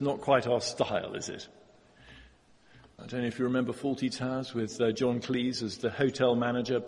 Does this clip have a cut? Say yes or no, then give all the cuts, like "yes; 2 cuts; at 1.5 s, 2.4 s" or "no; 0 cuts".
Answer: yes; 1 cut; at 3.0 s